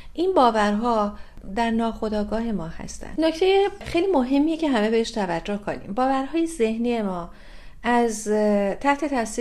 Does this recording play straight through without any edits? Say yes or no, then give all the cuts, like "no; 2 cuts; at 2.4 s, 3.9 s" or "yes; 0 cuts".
no; 1 cut; at 3.2 s